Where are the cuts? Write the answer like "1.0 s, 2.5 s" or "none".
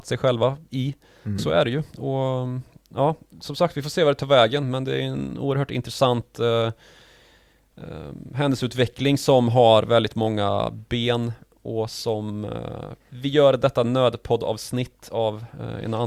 1.4 s, 13.0 s